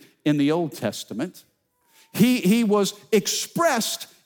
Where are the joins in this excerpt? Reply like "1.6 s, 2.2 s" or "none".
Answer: none